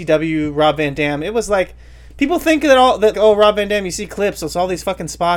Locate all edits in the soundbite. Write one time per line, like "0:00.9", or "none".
0:03.1